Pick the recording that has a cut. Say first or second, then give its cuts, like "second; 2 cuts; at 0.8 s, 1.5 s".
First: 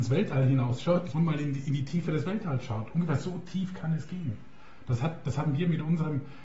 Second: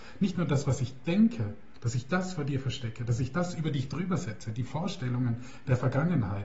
first; 1 cut; at 1.1 s